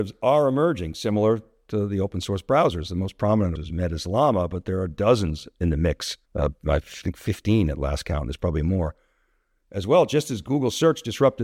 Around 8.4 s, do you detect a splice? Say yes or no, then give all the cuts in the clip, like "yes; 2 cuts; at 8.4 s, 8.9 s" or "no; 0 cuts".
no; 2 cuts; at 3.6 s, 6.3 s